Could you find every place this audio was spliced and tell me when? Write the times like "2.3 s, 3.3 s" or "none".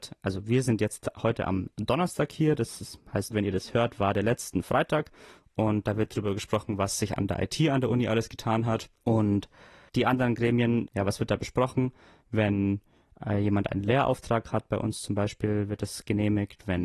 3.3 s, 10.9 s